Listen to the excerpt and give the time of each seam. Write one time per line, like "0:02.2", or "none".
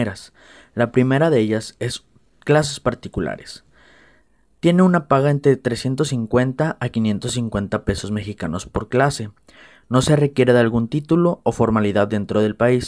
none